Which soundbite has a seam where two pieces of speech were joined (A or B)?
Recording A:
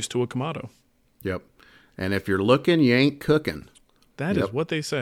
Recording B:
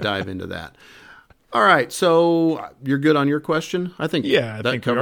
A